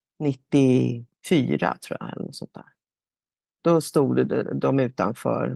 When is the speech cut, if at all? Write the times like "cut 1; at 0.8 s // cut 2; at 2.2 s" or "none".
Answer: cut 1; at 1.1 s